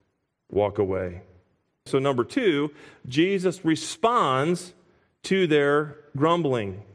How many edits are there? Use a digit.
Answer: 1